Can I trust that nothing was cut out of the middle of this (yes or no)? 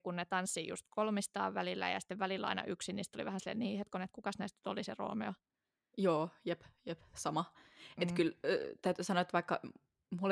yes